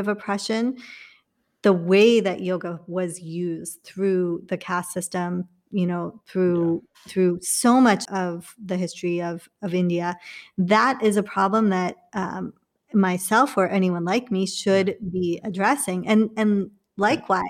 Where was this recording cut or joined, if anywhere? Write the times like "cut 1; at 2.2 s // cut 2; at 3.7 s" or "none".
cut 1; at 8.1 s